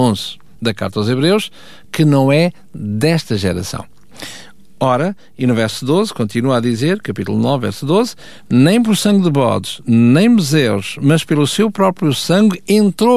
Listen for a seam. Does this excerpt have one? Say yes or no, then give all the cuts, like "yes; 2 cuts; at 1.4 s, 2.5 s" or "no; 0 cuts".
no; 0 cuts